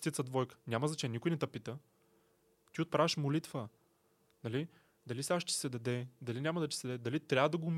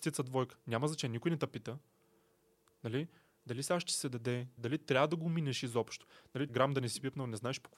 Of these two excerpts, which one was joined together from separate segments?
second; 3 cuts; at 2.7 s, 4.6 s, 6.5 s

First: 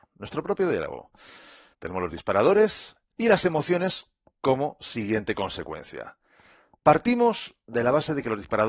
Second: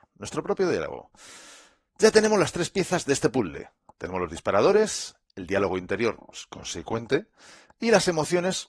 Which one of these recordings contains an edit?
first; 2 cuts; at 1.7 s, 3.1 s

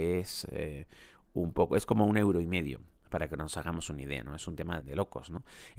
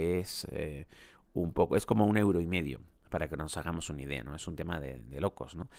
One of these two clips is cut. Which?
first; 1 cut; at 4.8 s

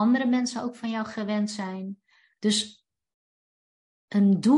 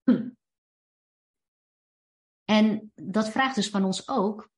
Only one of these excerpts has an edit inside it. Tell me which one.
first; 1 cut; at 2.4 s

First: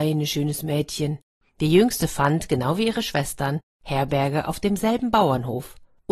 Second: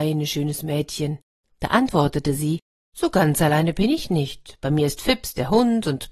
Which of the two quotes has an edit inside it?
first; 1 cut; at 1.4 s

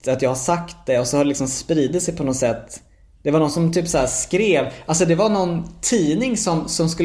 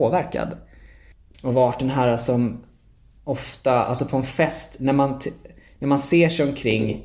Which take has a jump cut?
second; 1 cut; at 1.3 s

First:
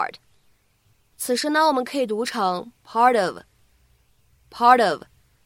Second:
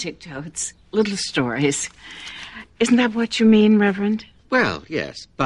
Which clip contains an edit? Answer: first; 1 cut; at 1.1 s

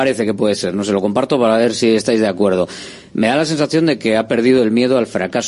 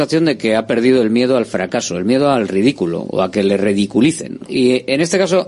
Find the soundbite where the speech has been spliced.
second; 1 cut; at 4.5 s

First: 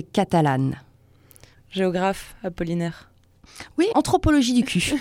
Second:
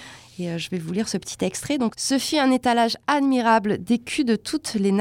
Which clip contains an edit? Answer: first; 1 cut; at 3.9 s

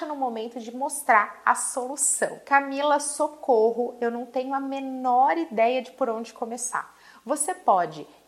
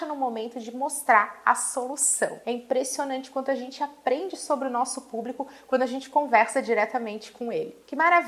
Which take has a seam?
second; 1 cut; at 2.4 s

